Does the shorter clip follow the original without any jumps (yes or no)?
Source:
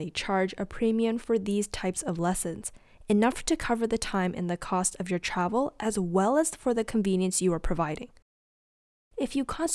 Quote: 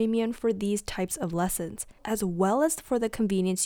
no